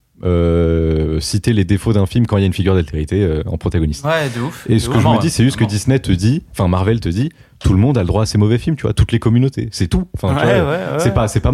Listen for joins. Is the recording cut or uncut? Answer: uncut